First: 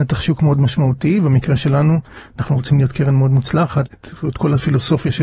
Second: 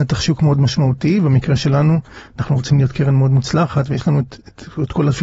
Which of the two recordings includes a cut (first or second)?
first